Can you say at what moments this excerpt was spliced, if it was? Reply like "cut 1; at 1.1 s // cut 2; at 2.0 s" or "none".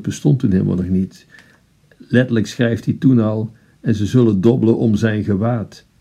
none